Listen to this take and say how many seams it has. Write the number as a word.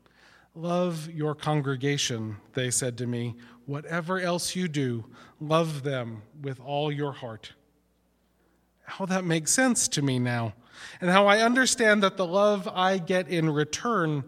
zero